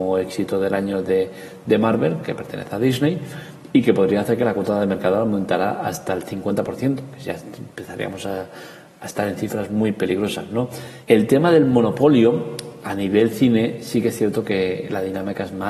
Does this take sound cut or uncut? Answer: cut